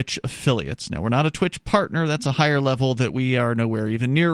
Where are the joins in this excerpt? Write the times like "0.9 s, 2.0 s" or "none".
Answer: none